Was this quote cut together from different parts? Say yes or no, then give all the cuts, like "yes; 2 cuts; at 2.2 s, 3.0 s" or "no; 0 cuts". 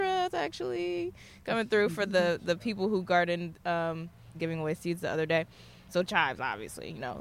yes; 1 cut; at 4.3 s